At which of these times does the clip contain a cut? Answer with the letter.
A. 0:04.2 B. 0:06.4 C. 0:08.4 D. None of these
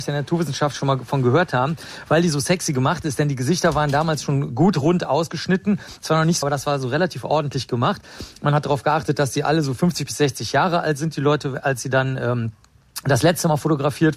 B